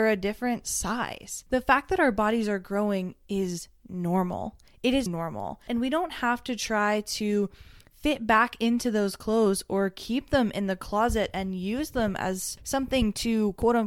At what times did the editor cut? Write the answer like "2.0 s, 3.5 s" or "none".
1.5 s, 5.1 s

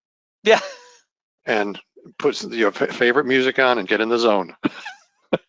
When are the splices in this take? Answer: 3.9 s

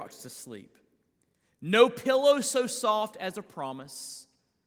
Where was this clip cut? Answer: none

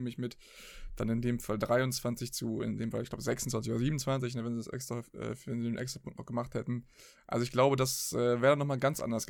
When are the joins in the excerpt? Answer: none

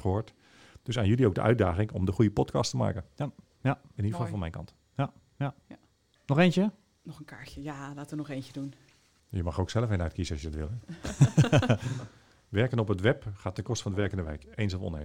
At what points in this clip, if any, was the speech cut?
4.0 s

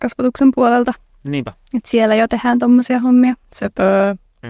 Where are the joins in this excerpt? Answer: none

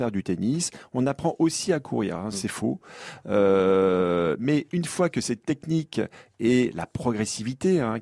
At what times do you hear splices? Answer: 2.3 s

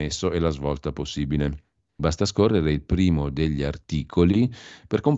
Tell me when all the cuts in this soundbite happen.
2.0 s

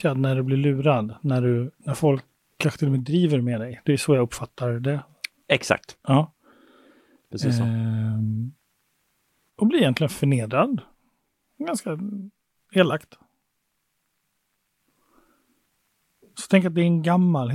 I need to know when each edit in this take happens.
none

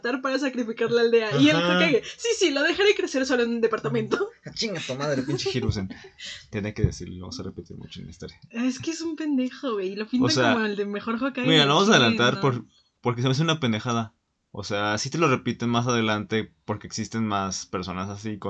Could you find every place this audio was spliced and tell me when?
none

